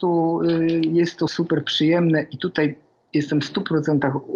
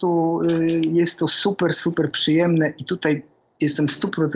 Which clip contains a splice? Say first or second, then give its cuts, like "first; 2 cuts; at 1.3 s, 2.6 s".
first; 1 cut; at 1.3 s